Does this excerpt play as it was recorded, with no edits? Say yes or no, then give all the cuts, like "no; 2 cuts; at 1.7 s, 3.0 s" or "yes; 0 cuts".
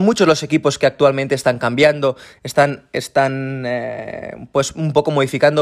yes; 0 cuts